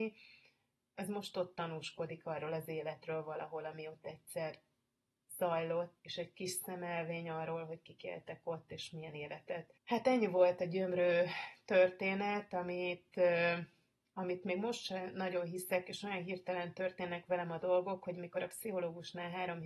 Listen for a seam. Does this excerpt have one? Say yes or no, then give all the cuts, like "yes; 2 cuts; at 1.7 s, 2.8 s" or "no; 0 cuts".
yes; 2 cuts; at 6.0 s, 9.8 s